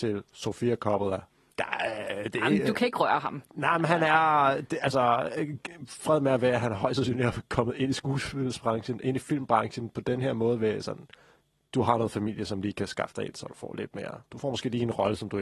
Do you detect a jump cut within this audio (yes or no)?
no